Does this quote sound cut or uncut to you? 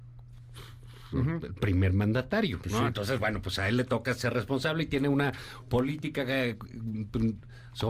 uncut